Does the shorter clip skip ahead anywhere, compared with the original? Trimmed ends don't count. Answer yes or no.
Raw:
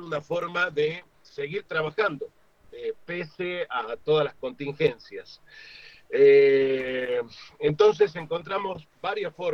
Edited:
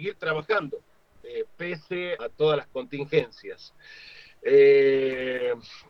yes